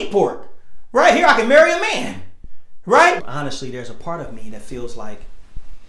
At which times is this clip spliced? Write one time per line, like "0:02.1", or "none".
0:03.2